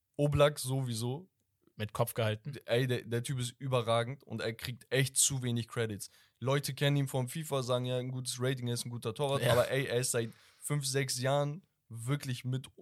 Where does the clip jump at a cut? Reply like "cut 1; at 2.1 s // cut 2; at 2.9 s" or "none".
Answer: none